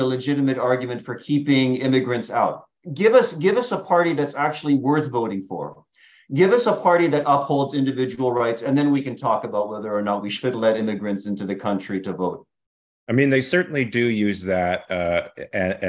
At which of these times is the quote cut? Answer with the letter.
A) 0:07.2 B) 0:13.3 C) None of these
A